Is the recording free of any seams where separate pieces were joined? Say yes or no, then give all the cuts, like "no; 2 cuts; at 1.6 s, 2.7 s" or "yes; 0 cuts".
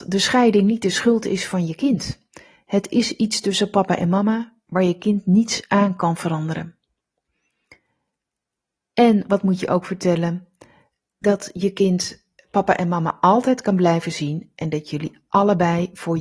yes; 0 cuts